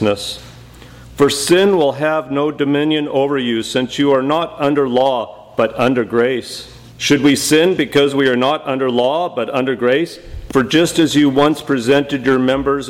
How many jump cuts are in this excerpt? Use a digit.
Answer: 2